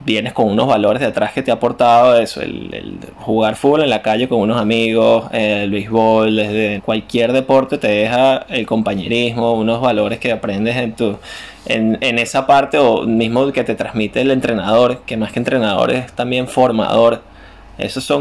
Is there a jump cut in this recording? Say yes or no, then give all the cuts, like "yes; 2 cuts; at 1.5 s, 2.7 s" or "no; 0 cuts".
yes; 1 cut; at 6.8 s